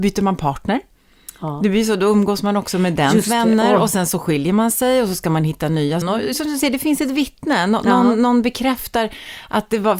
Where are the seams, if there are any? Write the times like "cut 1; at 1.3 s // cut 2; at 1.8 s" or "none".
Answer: cut 1; at 6.0 s